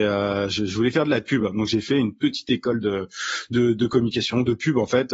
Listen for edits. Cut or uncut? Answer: uncut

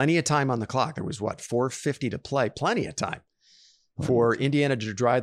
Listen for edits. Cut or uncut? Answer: uncut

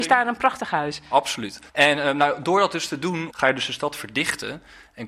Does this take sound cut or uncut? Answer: cut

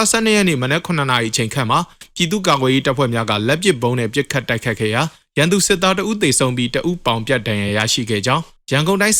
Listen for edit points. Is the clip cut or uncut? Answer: uncut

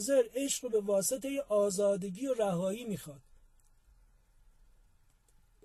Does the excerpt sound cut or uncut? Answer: uncut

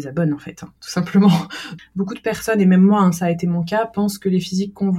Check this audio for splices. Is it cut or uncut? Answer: cut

